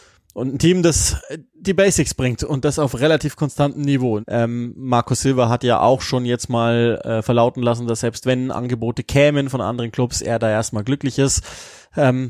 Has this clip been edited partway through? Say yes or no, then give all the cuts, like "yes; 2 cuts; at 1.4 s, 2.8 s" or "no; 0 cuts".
yes; 1 cut; at 4.2 s